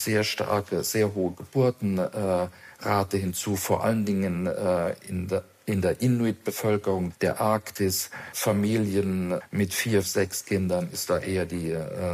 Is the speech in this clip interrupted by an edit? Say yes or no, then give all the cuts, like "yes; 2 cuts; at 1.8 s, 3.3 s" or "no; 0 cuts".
yes; 1 cut; at 10.0 s